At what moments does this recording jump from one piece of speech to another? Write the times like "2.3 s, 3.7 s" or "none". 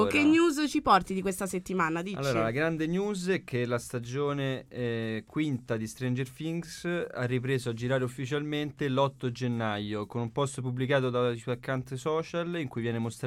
none